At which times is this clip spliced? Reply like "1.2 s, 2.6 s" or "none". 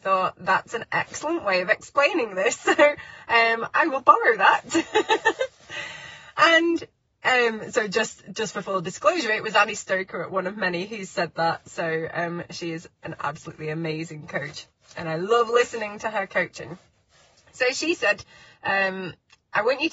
none

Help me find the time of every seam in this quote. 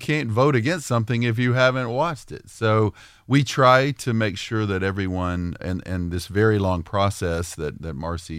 5.6 s

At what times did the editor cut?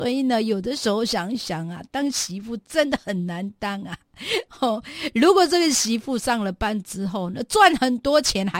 none

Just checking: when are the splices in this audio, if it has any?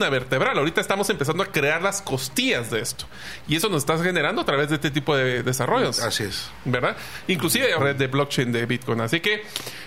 7.8 s

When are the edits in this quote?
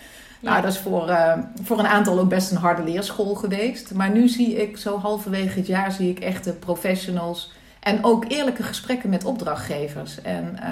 7.8 s

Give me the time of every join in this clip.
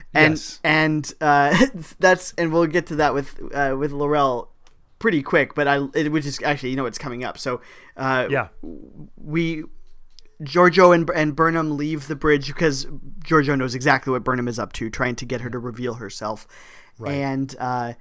none

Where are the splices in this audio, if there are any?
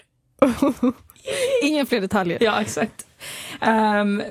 2.4 s

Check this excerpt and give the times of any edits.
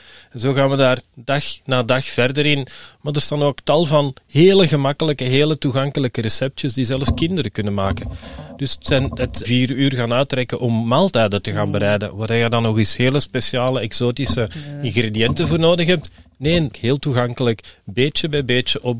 9.4 s, 16.7 s

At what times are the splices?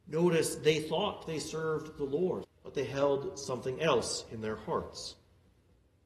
2.4 s

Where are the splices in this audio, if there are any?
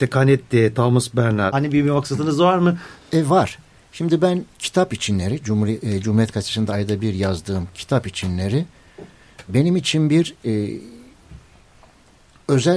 3.0 s, 9.5 s

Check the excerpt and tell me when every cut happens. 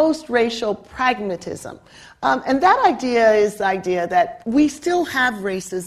4.4 s

